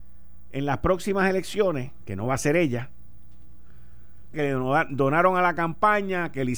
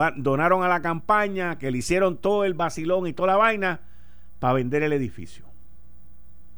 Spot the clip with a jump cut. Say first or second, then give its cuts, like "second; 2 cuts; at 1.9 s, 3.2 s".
first; 1 cut; at 4.3 s